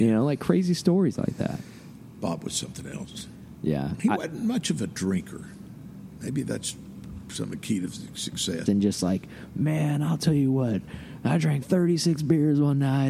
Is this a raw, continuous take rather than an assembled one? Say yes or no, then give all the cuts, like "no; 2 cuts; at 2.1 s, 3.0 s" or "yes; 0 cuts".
no; 2 cuts; at 8.7 s, 11.6 s